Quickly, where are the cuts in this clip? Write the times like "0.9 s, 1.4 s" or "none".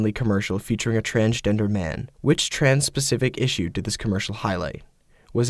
2.1 s